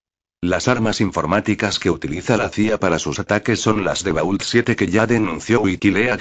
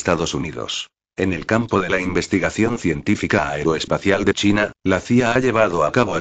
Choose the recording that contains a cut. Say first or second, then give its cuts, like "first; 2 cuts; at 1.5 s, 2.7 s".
second; 1 cut; at 1.0 s